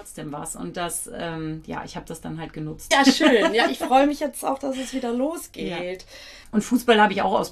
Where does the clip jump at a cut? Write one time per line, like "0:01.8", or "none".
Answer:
0:02.9
0:06.4